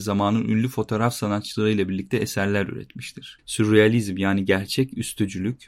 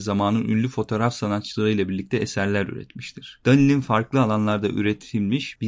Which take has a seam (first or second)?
first